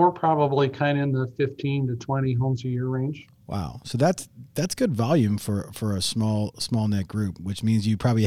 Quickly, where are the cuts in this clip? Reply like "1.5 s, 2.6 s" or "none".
none